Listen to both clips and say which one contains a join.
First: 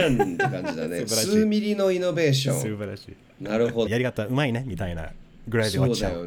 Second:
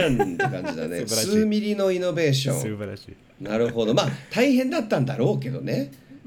first; 1 cut; at 3.9 s

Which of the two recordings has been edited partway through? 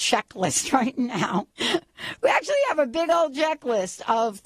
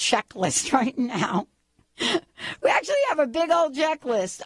first; 1 cut; at 1.5 s

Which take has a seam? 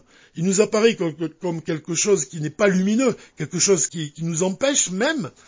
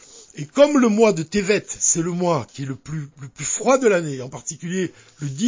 first; 1 cut; at 3.9 s

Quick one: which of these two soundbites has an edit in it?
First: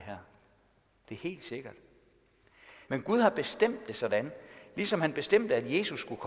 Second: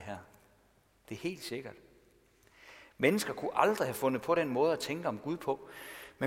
first; 1 cut; at 2.8 s

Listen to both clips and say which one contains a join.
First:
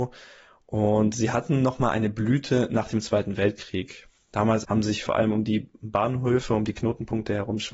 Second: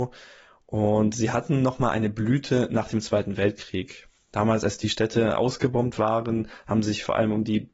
first; 1 cut; at 4.6 s

